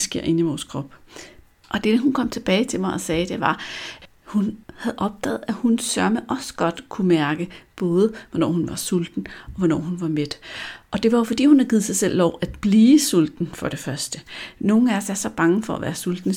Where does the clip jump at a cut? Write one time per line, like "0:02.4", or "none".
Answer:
0:01.6